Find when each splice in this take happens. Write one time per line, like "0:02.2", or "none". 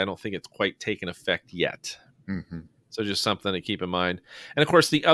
none